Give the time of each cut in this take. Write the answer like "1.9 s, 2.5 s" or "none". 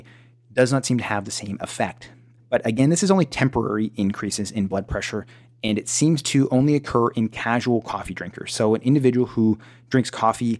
2.4 s